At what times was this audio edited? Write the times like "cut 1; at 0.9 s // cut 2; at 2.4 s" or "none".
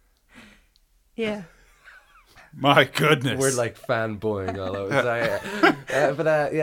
none